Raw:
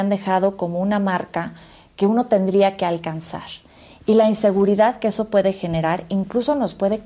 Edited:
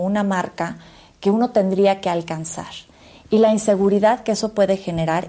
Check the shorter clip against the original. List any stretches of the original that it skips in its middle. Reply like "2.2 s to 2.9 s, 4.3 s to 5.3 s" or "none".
none